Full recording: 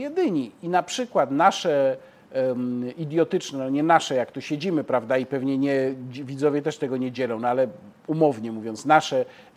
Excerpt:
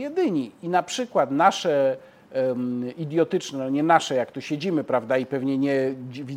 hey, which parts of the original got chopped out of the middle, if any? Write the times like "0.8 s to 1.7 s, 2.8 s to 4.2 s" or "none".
none